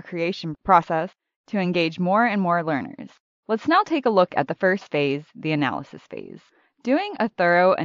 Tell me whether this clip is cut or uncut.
cut